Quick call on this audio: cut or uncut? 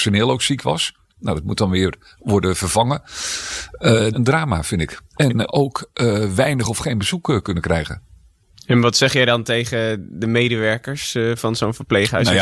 cut